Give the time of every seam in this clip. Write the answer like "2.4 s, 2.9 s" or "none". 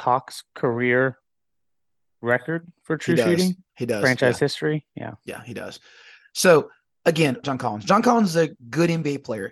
7.4 s